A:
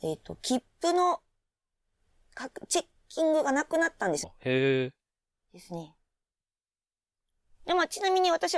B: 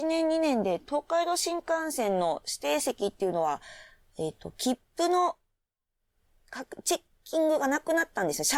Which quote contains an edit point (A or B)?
A